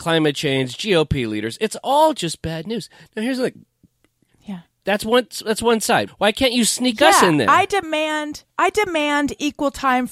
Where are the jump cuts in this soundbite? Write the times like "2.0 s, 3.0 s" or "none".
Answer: 4.8 s, 6.1 s, 8.5 s